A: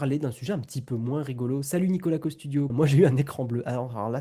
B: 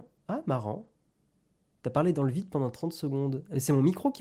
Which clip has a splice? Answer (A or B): A